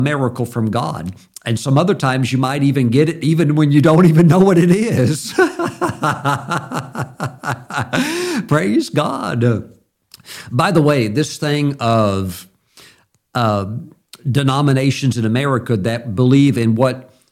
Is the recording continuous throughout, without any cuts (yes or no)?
yes